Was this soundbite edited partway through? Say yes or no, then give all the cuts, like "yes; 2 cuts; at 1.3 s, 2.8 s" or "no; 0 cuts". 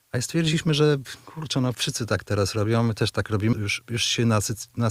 yes; 2 cuts; at 1.7 s, 3.5 s